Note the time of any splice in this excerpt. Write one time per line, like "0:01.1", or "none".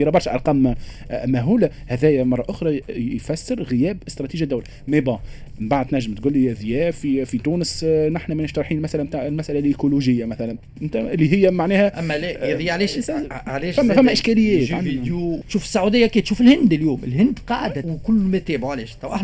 0:15.4
0:17.8